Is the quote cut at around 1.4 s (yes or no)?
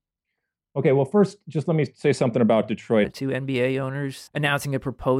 no